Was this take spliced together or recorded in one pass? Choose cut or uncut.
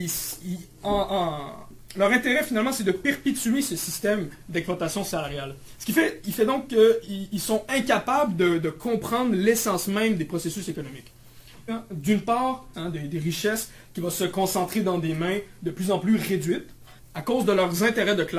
cut